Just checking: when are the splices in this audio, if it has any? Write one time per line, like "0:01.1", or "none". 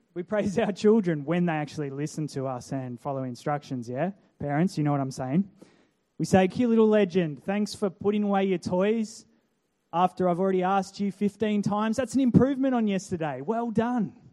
0:06.5